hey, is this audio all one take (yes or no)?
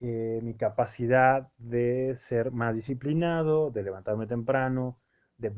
yes